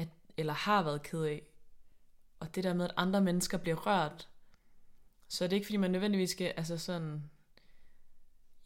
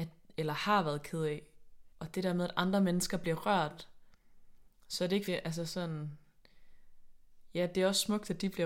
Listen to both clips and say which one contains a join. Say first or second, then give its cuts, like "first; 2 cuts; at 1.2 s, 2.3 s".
second; 2 cuts; at 1.9 s, 5.3 s